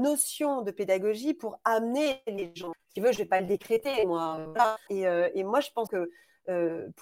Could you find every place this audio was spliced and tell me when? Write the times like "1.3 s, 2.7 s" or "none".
2.7 s, 4.9 s, 5.9 s